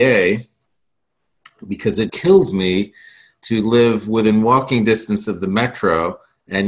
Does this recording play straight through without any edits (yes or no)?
no